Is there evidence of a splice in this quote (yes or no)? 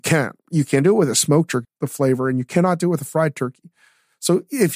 yes